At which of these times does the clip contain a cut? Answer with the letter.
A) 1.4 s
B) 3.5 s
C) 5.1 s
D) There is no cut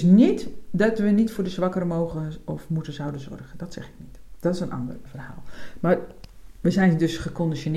C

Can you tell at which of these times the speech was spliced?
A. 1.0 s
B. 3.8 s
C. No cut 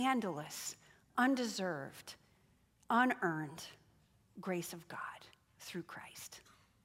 C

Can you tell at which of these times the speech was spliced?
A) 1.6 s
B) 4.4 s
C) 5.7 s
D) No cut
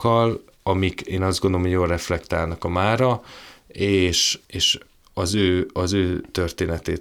B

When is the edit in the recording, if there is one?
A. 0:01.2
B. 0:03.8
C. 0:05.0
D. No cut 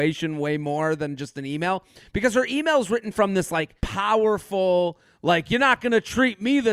B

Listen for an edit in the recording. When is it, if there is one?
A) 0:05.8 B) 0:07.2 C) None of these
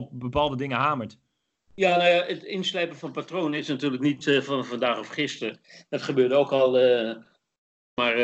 C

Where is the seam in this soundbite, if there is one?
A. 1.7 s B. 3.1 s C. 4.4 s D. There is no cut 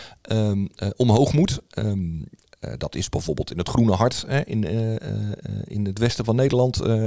D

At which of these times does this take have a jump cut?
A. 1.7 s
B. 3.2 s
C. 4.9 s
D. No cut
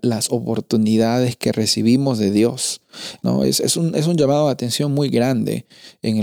B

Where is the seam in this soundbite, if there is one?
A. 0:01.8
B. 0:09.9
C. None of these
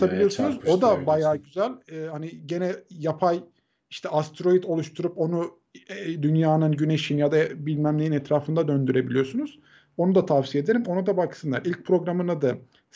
C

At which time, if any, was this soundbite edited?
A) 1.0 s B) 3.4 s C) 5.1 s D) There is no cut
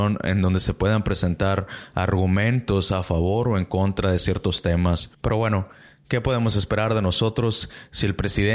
C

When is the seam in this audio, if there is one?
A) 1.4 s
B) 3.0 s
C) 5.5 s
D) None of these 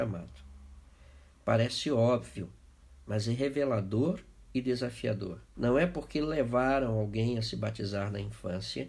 C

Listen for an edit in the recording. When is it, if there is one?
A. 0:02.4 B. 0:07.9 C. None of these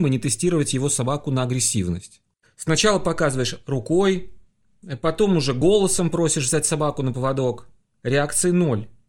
A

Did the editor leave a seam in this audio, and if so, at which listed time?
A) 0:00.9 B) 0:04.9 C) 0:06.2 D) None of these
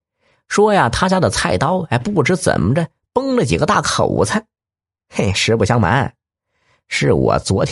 D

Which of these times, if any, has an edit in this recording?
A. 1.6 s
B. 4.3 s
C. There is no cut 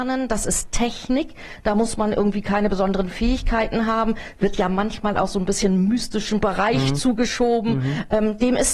C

